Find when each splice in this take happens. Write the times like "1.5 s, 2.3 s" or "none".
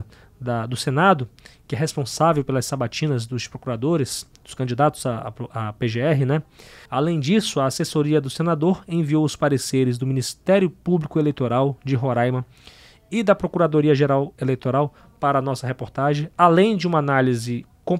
6.9 s